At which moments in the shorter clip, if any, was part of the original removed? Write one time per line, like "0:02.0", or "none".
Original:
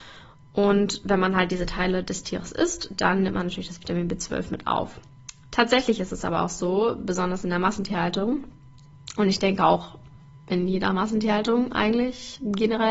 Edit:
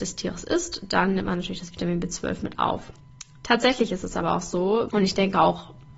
0:04.9